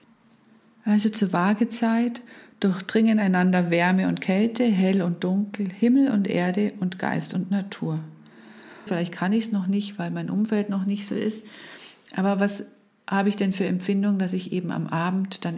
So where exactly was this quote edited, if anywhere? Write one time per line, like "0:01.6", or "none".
0:08.9